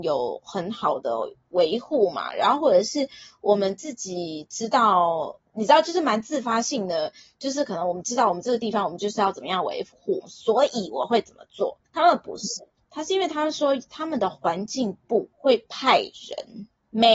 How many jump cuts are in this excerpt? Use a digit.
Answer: 2